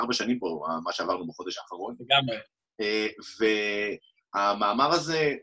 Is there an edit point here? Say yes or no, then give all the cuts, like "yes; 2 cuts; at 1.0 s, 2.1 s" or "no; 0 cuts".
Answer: no; 0 cuts